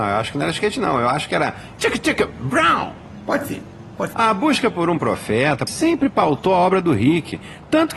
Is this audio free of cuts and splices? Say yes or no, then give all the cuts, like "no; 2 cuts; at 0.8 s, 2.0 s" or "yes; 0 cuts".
no; 2 cuts; at 4.1 s, 5.7 s